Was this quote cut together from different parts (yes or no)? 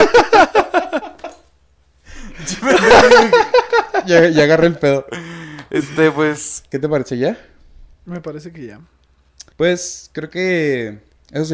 yes